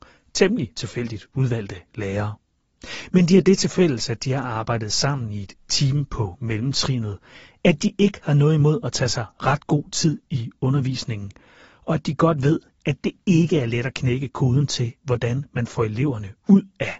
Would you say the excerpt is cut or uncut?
uncut